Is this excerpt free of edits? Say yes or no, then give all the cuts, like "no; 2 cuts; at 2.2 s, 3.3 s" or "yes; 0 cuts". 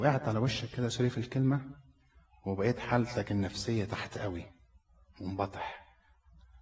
yes; 0 cuts